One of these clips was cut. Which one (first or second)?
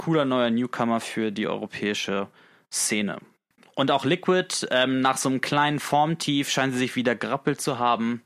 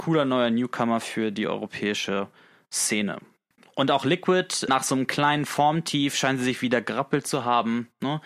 second